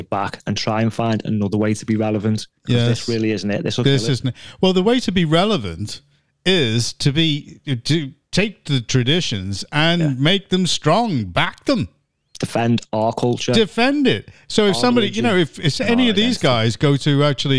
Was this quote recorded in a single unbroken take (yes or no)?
yes